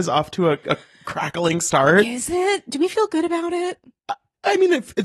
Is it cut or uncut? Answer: uncut